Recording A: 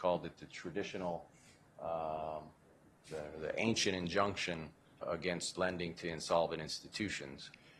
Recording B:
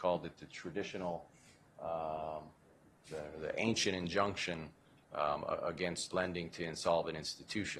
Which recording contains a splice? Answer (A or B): A